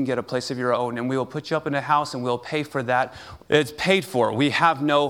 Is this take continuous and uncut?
no; 1 cut; at 3.4 s

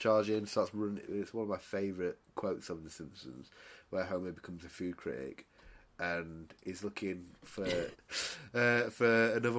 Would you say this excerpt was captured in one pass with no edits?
no; 2 cuts; at 1.1 s, 7.9 s

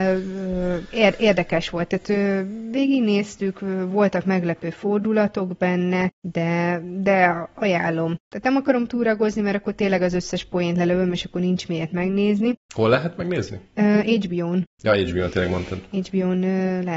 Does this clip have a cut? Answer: no; 0 cuts

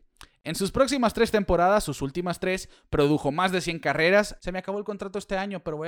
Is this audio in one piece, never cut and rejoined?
no; 1 cut; at 4.4 s

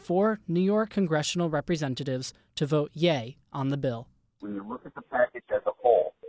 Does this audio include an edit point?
yes; 1 cut; at 4.4 s

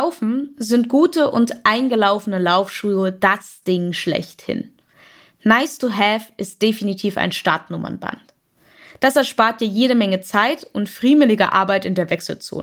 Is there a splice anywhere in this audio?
no; 0 cuts

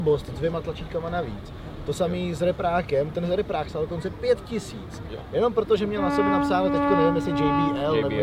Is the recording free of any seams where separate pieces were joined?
yes; 0 cuts

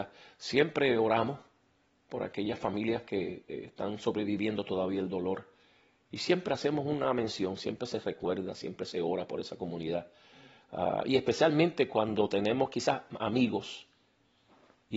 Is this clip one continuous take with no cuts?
yes; 0 cuts

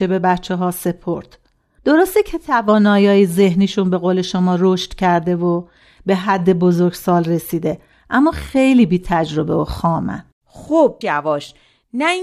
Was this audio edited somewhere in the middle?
yes; 1 cut; at 11.0 s

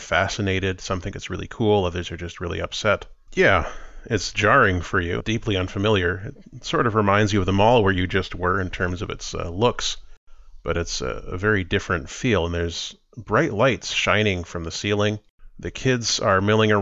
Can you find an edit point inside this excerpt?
yes; 2 cuts; at 3.3 s, 5.2 s

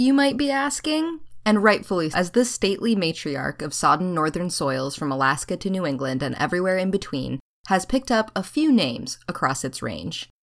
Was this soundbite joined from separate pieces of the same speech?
yes; 1 cut; at 2.1 s

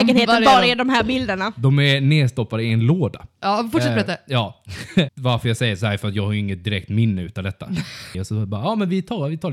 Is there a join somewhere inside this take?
yes; 2 cuts; at 5.1 s, 8.1 s

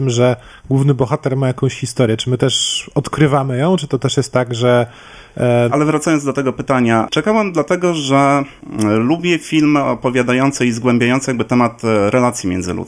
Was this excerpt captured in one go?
no; 1 cut; at 5.7 s

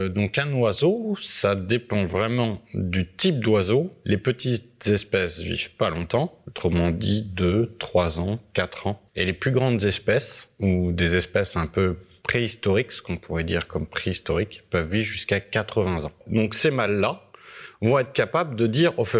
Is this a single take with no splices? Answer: no; 2 cuts; at 9.1 s, 16.2 s

